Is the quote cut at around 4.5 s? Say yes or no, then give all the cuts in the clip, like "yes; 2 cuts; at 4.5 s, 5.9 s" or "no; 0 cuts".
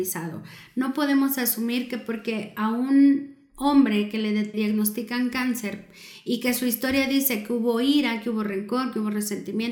yes; 1 cut; at 4.5 s